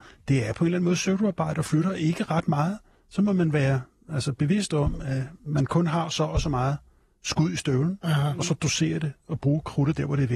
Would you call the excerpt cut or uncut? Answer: uncut